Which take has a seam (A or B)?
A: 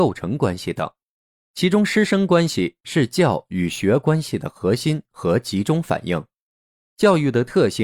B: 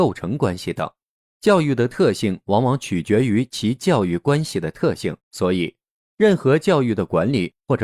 B